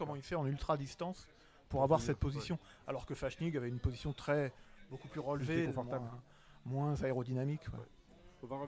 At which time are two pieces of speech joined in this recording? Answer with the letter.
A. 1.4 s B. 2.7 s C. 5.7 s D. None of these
C